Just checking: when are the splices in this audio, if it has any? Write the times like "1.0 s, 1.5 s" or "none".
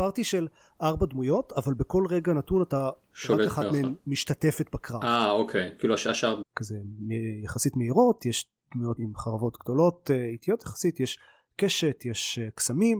6.4 s, 9.0 s